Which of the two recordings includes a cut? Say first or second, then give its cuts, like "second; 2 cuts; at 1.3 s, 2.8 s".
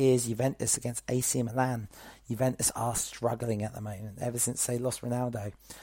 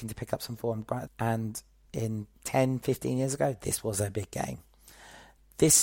second; 2 cuts; at 1.1 s, 2.3 s